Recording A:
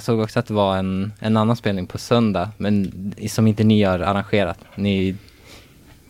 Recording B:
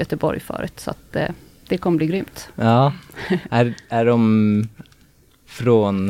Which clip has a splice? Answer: A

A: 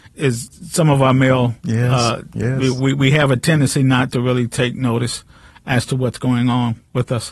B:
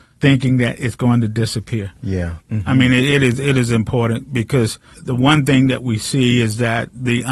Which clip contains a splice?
B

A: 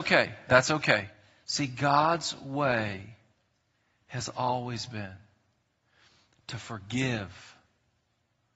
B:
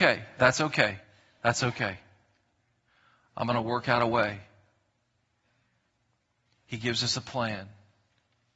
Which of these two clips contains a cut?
A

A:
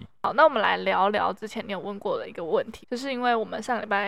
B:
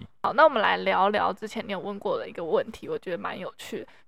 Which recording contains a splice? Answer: A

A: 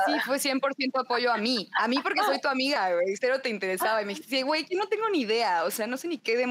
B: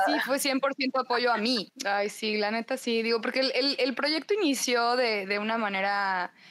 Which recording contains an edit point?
B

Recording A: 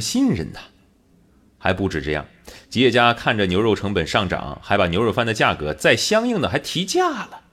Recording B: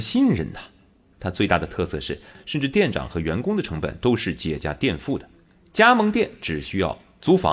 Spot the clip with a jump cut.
B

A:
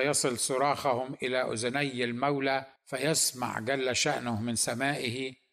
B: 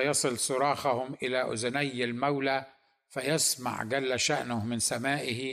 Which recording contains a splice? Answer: A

